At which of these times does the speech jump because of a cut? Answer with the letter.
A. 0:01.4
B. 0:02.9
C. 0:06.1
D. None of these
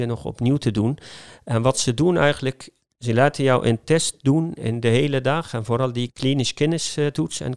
C